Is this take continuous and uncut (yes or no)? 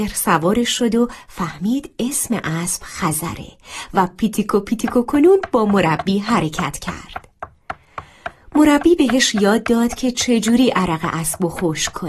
yes